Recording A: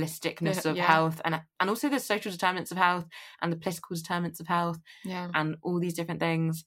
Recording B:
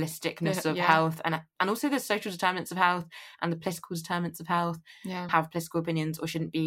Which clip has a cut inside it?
B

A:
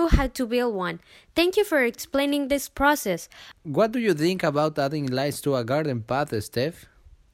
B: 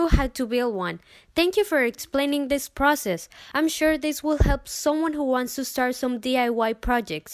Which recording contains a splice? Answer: A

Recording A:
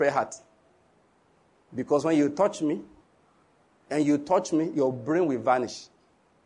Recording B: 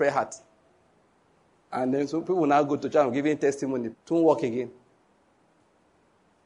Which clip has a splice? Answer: B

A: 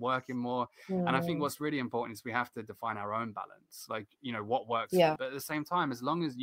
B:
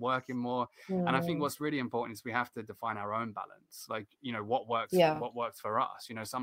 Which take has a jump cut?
A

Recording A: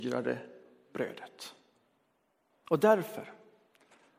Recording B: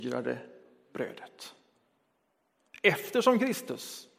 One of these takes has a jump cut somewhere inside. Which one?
A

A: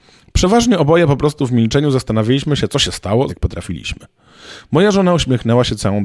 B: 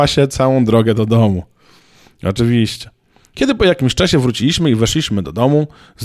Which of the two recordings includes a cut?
A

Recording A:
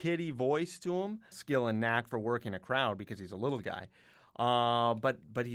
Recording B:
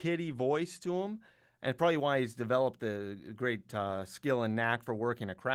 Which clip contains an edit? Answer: A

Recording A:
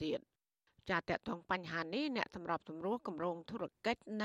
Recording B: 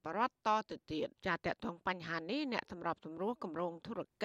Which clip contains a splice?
B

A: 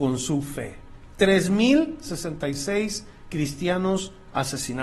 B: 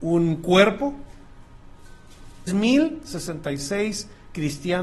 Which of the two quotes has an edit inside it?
B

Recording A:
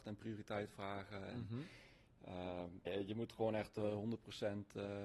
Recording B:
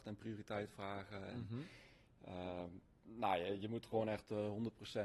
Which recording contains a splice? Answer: A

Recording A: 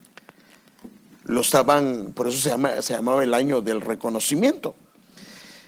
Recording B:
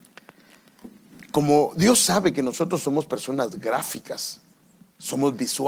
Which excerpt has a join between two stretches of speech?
A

